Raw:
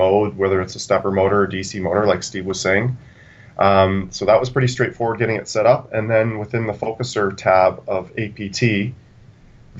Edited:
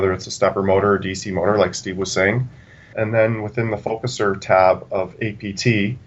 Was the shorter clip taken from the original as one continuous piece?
no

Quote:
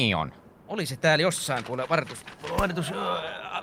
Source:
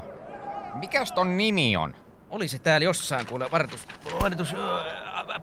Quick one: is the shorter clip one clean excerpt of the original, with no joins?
yes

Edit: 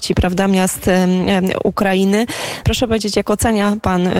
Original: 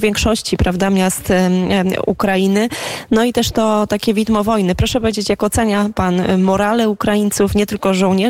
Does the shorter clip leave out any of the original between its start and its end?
yes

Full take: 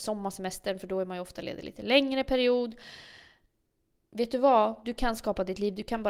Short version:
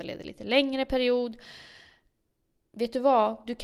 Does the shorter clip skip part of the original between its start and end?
no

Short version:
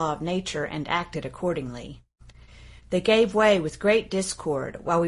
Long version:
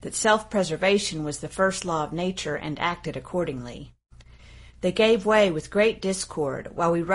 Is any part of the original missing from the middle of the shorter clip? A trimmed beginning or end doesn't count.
no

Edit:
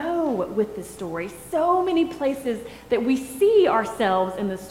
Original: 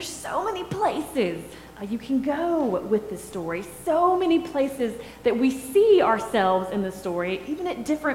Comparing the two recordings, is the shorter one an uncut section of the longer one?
yes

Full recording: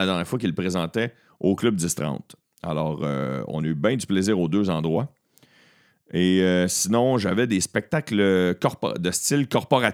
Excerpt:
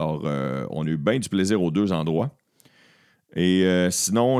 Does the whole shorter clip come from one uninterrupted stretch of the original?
yes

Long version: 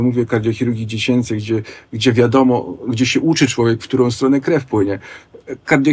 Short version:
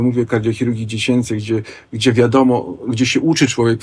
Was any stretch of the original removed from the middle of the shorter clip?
no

